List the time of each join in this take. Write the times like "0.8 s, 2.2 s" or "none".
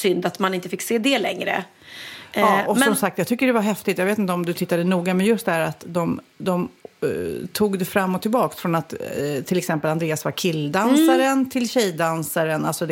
none